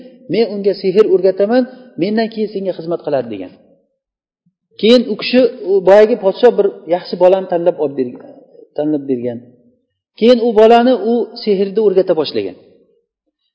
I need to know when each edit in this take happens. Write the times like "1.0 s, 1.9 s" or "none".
none